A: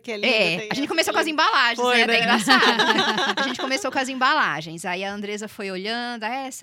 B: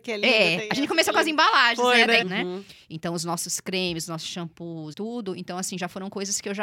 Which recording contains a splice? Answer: B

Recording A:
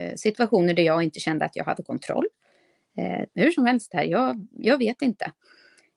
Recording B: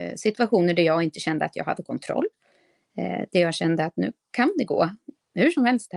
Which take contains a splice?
A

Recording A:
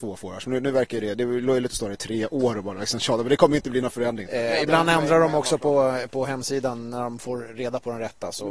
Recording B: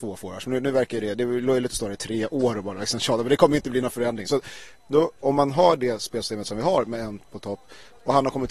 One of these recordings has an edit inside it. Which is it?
A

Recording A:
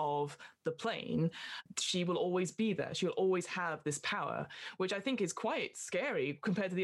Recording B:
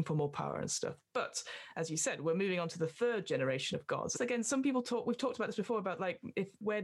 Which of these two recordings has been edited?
B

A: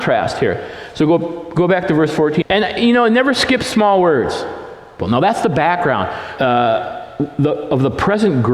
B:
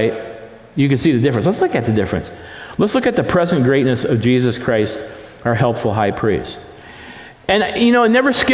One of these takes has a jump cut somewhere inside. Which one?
A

